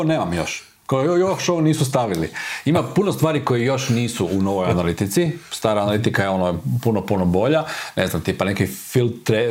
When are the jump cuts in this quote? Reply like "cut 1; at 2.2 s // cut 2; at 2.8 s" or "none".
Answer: none